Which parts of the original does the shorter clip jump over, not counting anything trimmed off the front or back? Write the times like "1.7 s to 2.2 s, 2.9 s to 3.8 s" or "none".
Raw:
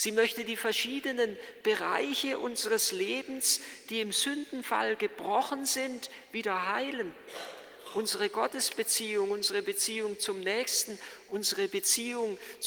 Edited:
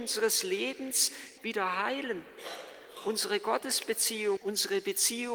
3.9 s to 6.3 s, 9.3 s to 11.2 s